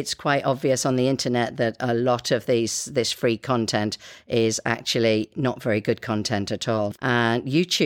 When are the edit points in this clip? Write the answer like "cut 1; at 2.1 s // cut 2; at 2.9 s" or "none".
cut 1; at 6.9 s